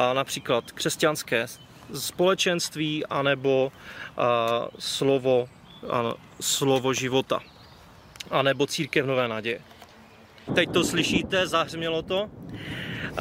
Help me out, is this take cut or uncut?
cut